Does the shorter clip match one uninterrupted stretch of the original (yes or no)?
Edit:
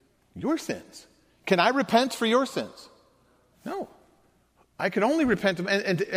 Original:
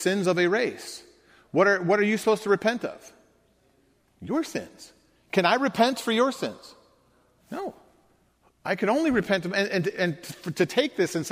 yes